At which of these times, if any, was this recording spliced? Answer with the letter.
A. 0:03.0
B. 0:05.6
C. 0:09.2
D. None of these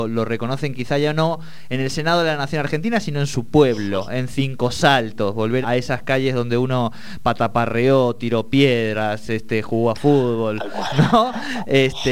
B